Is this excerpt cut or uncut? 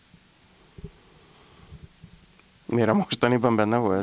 cut